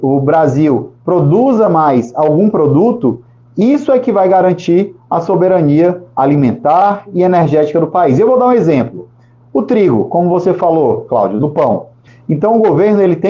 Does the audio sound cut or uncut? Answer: cut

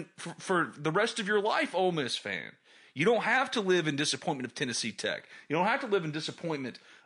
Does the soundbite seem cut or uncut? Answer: uncut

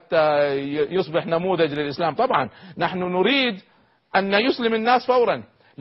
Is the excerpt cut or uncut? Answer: uncut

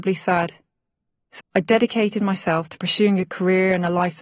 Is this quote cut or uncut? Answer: cut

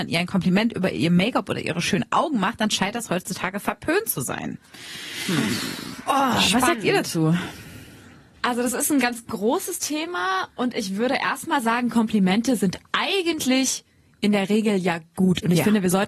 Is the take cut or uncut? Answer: uncut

